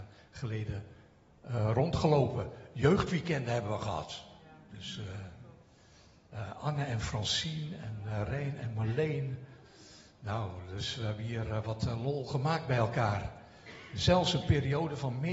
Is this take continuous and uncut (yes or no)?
yes